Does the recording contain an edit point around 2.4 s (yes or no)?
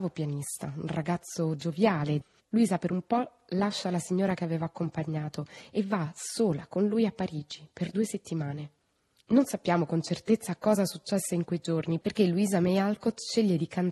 yes